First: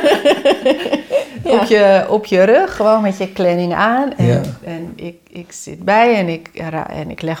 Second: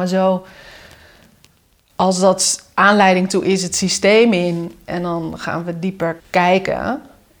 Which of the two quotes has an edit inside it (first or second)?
second